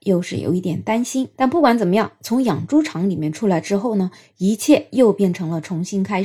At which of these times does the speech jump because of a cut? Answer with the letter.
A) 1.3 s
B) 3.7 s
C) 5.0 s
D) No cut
A